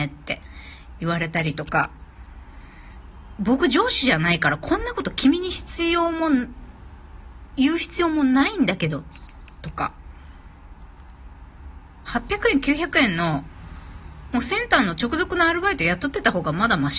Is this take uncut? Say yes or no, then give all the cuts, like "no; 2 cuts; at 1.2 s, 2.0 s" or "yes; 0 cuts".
no; 1 cut; at 12.1 s